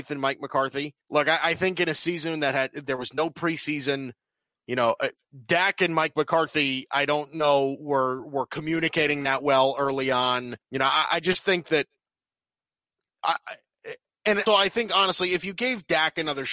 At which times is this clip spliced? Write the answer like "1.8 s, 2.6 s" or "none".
1.0 s, 10.6 s, 14.5 s